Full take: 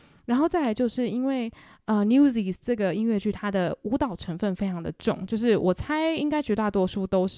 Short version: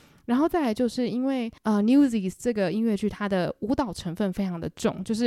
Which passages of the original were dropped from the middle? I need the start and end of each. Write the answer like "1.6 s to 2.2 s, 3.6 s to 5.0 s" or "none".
1.6 s to 1.8 s